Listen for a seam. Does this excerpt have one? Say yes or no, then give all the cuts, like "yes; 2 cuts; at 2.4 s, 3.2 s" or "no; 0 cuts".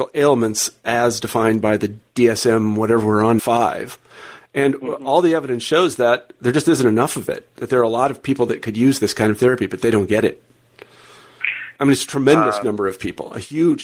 yes; 2 cuts; at 3.4 s, 11.8 s